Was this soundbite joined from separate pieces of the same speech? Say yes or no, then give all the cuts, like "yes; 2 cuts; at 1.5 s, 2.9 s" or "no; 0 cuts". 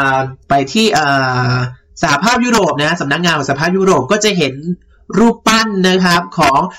no; 0 cuts